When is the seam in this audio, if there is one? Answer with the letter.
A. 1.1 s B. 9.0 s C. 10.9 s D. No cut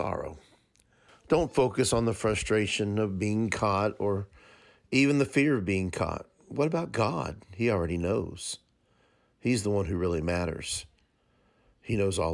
A